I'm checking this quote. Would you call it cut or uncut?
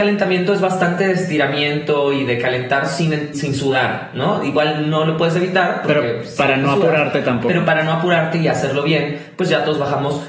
cut